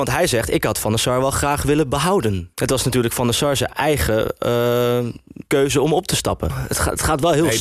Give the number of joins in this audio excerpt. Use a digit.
3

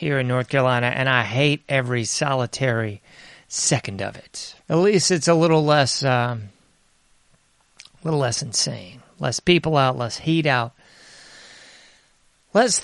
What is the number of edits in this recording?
1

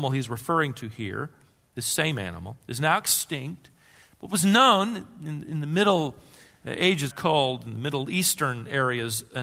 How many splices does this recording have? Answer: 1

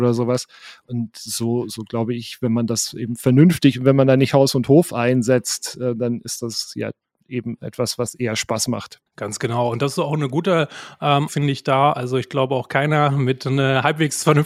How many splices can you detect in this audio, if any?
2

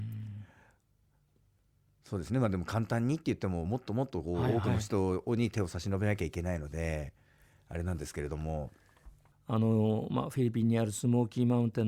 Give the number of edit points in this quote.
0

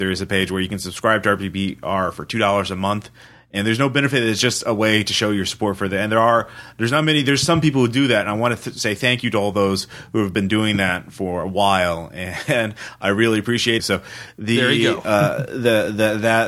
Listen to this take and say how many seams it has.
1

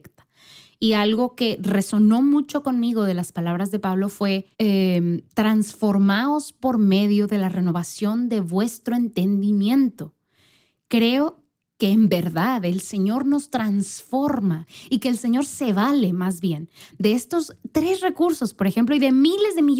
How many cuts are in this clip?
1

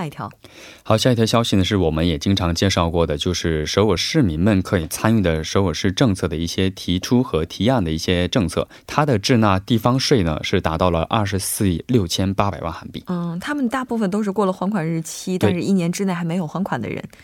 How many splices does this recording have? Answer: 2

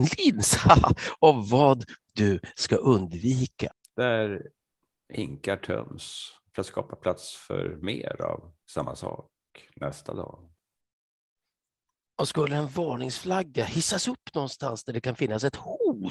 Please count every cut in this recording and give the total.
1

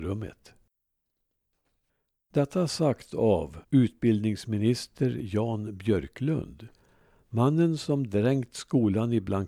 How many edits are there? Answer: 1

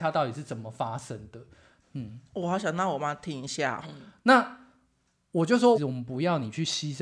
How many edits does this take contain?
3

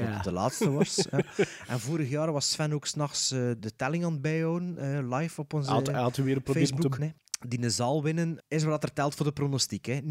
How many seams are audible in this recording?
3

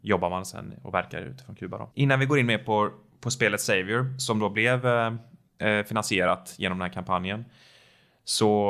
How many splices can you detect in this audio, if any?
1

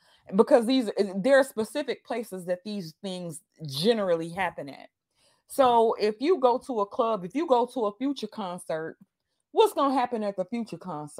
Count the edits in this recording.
0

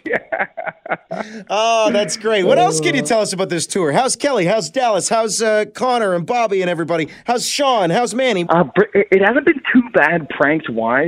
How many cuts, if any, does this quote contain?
1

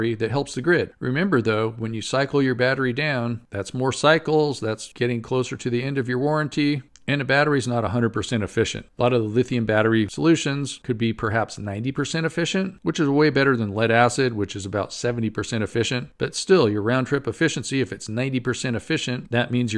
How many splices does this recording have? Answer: 0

